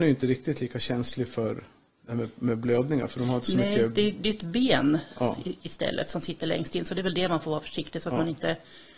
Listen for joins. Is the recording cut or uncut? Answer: uncut